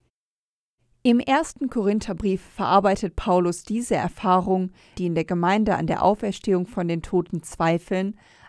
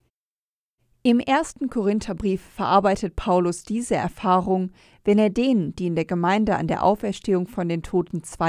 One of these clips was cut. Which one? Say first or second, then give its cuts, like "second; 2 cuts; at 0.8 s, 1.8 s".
first; 1 cut; at 4.9 s